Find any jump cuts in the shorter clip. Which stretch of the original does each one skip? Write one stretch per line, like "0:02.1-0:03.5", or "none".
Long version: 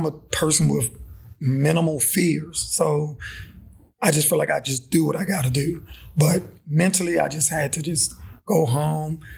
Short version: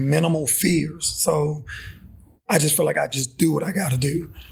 none